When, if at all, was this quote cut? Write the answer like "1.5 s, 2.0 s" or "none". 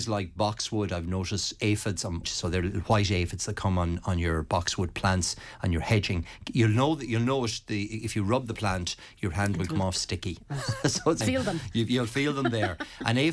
2.2 s, 11.2 s